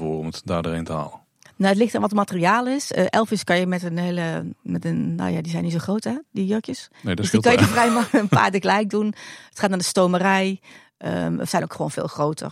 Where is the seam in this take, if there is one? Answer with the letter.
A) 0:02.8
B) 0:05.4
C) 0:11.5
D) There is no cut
C